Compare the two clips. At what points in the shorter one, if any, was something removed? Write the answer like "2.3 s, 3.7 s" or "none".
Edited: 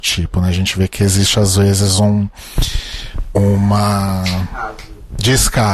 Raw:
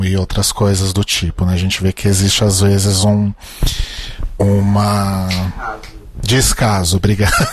none